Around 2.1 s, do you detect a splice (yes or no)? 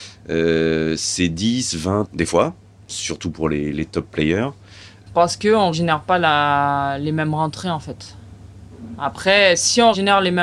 yes